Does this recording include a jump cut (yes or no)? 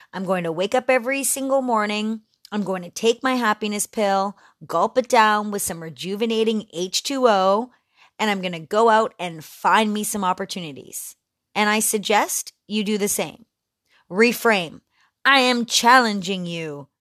no